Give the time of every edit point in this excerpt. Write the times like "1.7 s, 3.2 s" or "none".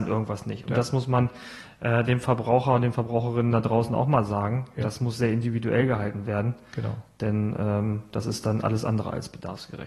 none